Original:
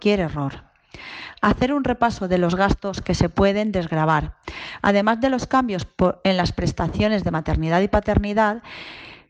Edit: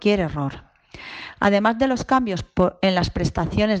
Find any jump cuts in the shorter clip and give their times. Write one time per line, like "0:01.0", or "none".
0:01.4